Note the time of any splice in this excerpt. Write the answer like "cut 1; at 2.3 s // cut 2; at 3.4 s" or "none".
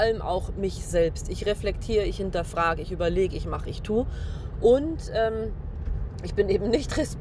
none

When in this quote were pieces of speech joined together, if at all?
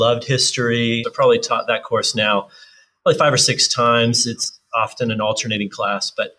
cut 1; at 1.0 s

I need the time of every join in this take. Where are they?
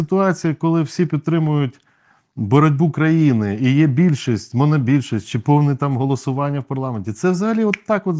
none

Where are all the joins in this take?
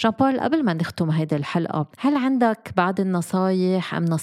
cut 1; at 1.9 s

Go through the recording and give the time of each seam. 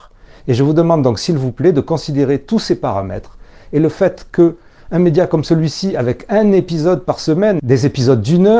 none

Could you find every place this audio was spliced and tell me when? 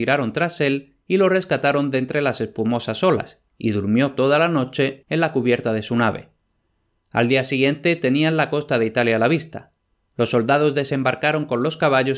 cut 1; at 5.0 s

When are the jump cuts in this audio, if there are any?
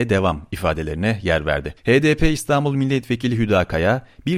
cut 1; at 1.8 s

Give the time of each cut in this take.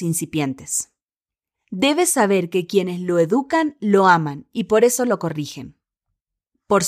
cut 1; at 1.5 s

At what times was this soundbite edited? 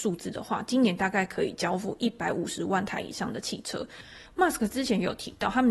cut 1; at 4.3 s

